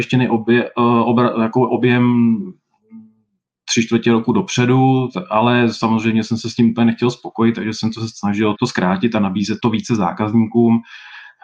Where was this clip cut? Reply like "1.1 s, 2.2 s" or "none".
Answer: 8.5 s, 9.6 s